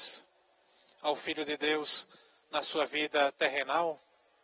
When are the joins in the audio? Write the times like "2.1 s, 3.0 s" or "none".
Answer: none